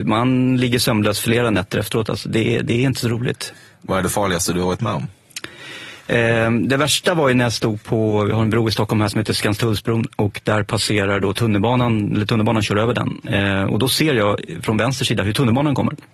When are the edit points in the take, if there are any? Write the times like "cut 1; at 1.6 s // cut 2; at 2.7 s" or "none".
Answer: cut 1; at 10.1 s // cut 2; at 13.2 s

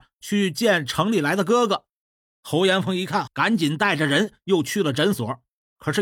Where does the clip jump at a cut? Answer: cut 1; at 3.3 s

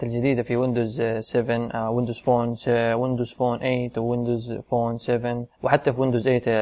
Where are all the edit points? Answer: cut 1; at 5.5 s

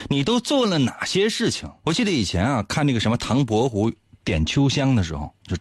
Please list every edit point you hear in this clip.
cut 1; at 1.8 s

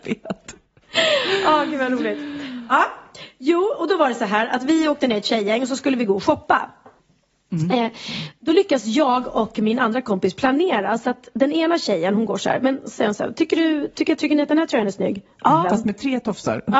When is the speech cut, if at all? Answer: cut 1; at 14.2 s // cut 2; at 15.6 s

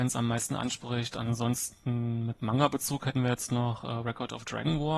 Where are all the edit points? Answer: none

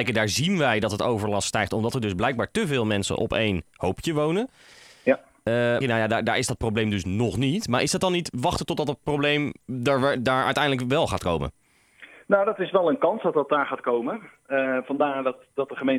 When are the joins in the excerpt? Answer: cut 1; at 5.8 s

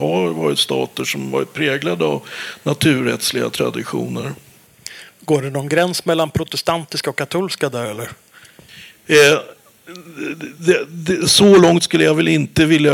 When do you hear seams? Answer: none

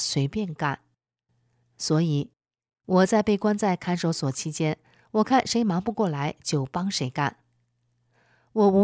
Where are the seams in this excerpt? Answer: none

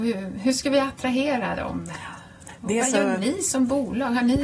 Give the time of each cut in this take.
none

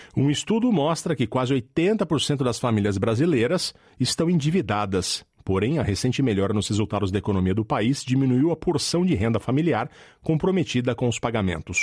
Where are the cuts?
none

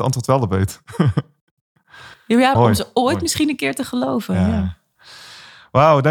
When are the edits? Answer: cut 1; at 2.5 s

